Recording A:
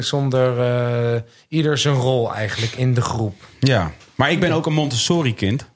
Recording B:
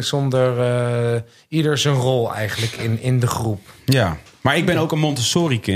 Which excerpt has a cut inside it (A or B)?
A